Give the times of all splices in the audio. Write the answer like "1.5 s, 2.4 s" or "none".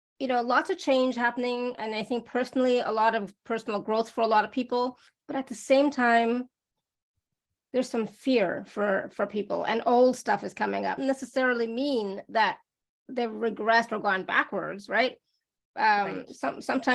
11.0 s

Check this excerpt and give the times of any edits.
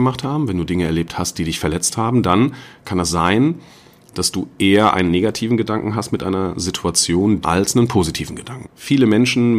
7.4 s, 8.6 s

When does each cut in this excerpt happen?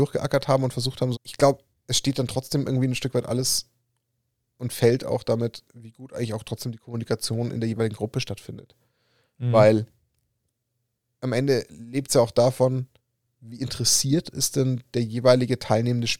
1.1 s

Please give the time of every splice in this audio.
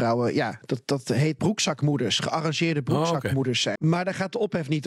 1.4 s, 3.8 s

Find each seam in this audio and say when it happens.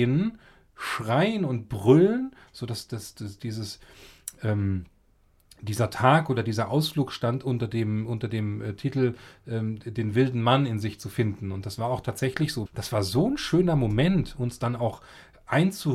12.7 s

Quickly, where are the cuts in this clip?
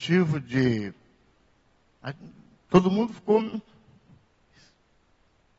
none

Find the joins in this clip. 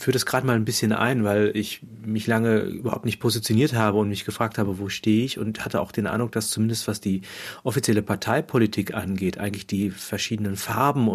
none

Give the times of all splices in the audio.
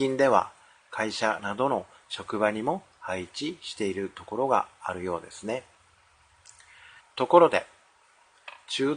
7.0 s

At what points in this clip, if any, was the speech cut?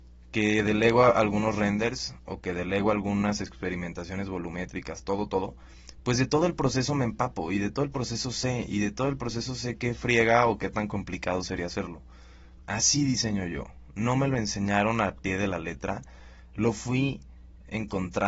12.6 s

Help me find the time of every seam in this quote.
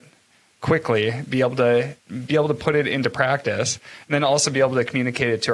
2.0 s

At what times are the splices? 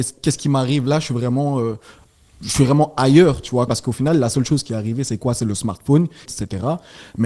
3.7 s, 6.3 s

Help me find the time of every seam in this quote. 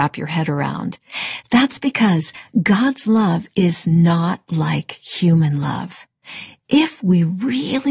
none

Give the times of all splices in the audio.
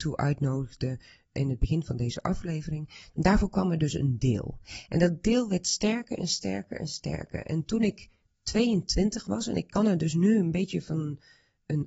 3.1 s

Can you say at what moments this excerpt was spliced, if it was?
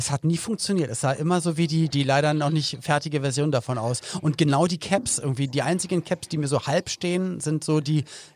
1.9 s

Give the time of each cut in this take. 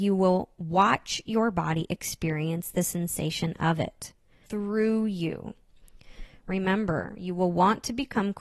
4.5 s

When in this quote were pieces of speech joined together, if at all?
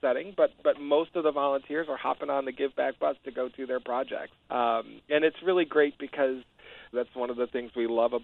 4.4 s, 6.9 s

